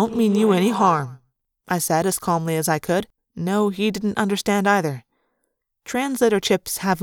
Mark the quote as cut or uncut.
cut